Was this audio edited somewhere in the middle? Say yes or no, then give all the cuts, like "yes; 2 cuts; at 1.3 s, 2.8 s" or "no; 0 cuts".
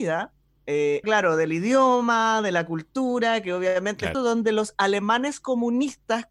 yes; 2 cuts; at 1.0 s, 4.1 s